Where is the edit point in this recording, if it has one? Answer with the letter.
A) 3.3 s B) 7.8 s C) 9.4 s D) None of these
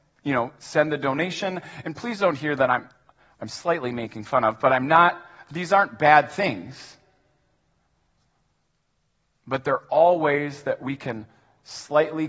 D